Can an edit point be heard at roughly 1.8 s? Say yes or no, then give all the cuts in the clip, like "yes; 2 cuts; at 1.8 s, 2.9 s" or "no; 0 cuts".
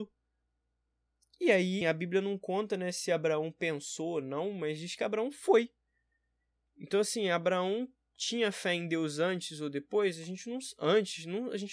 yes; 1 cut; at 1.8 s